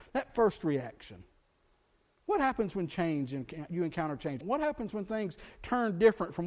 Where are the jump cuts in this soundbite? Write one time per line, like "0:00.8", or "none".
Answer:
0:04.4